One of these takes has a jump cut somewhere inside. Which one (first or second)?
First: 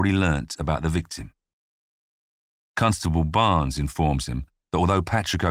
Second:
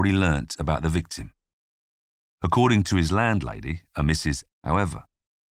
second